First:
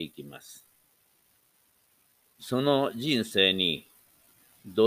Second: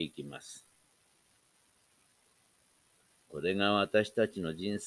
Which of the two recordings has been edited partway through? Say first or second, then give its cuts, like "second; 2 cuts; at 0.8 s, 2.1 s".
first; 1 cut; at 2.4 s